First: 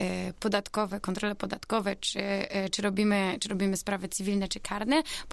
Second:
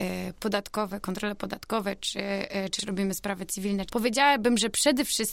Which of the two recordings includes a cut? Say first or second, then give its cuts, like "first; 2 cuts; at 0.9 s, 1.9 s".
second; 2 cuts; at 2.8 s, 3.9 s